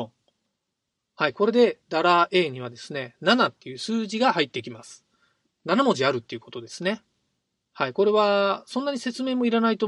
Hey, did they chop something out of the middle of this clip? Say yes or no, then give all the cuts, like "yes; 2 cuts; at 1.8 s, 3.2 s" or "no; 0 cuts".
no; 0 cuts